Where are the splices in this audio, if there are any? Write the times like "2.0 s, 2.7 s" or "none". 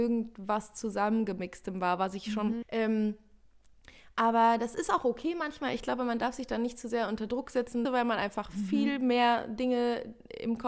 2.6 s, 7.8 s